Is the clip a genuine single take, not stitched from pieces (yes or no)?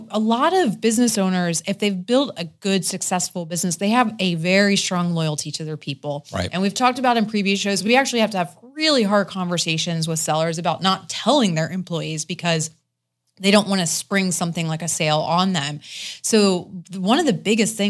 yes